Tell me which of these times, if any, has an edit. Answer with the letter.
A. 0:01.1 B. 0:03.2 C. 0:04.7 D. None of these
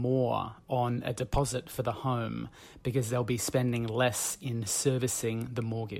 D